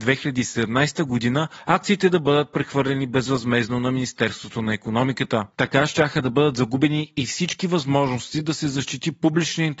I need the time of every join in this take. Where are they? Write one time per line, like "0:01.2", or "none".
0:05.5